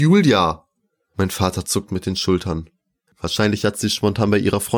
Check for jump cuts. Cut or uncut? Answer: cut